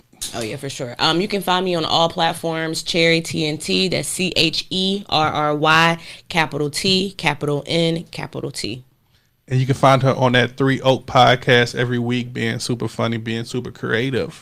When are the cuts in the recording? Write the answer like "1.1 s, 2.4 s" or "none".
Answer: none

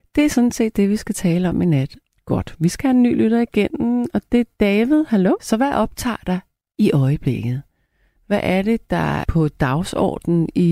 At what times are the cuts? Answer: 5.4 s, 8.2 s, 9.2 s

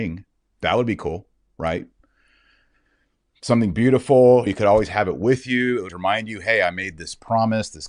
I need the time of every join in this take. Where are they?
4.5 s, 5.9 s

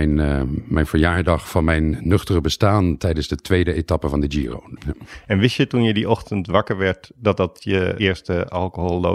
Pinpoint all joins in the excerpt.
4.8 s, 8.0 s

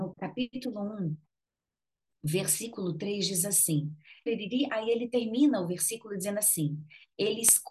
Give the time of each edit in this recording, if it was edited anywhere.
4.3 s

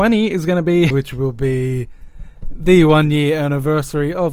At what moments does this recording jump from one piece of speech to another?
0.9 s

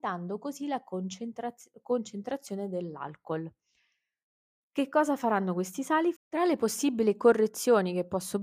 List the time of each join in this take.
4.6 s, 6.2 s

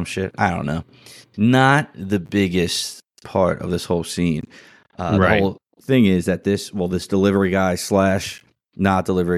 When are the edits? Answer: none

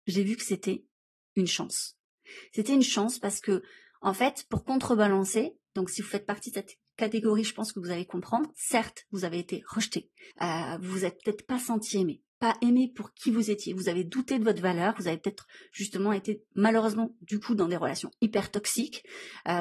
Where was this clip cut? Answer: 10.3 s

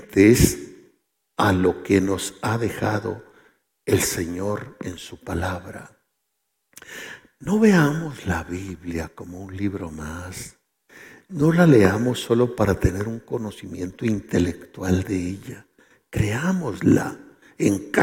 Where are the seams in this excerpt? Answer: none

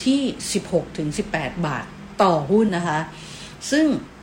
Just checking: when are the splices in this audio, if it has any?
2.7 s

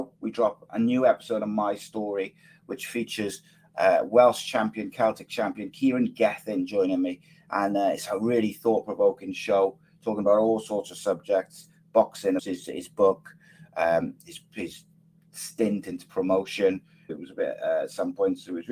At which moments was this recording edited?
12.4 s, 17.1 s

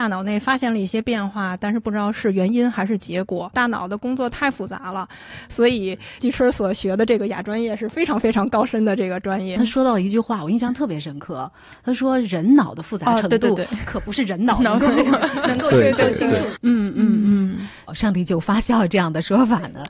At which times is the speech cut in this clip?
9.6 s, 16.6 s, 17.9 s

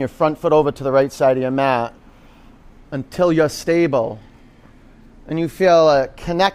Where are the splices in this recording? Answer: none

